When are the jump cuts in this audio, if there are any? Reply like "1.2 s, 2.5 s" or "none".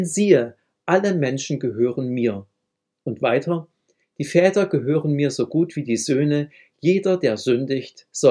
none